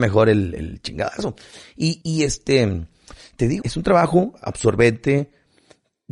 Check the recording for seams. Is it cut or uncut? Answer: cut